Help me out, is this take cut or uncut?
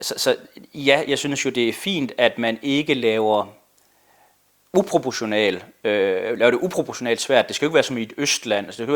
uncut